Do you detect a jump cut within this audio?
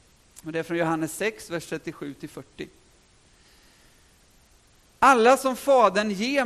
no; 0 cuts

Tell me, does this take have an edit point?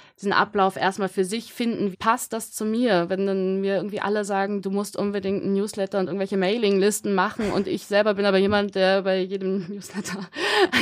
yes; 1 cut; at 1.9 s

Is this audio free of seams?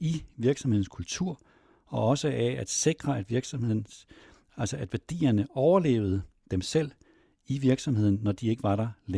yes; 0 cuts

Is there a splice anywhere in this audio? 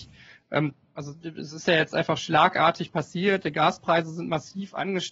yes; 1 cut; at 1.0 s

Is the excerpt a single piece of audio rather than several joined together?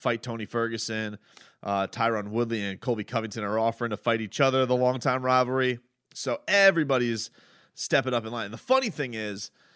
yes; 0 cuts

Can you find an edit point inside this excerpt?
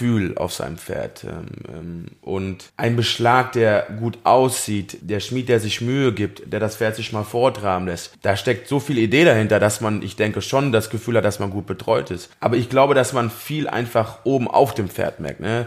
yes; 1 cut; at 2.7 s

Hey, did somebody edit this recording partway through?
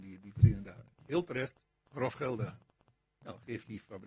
yes; 1 cut; at 0.9 s

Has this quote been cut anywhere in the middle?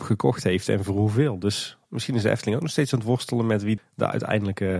yes; 1 cut; at 3.8 s

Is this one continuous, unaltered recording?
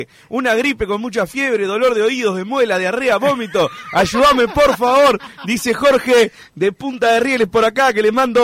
yes; 0 cuts

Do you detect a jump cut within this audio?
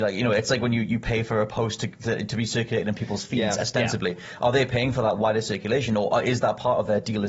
no; 0 cuts

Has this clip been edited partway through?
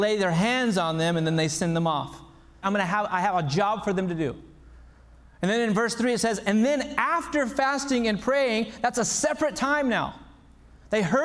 yes; 1 cut; at 2.6 s

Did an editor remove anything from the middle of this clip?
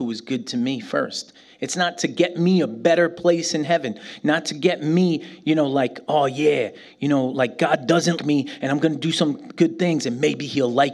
yes; 1 cut; at 8.2 s

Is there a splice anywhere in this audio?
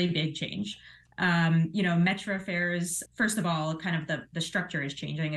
yes; 1 cut; at 3.1 s

